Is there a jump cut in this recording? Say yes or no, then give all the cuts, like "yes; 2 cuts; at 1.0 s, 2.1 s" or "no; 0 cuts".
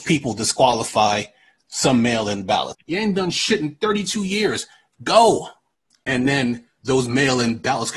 yes; 2 cuts; at 2.7 s, 5.9 s